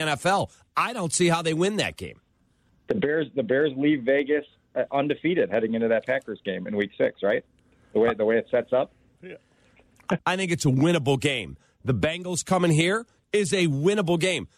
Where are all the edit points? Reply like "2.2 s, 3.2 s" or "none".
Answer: 9.2 s, 10.2 s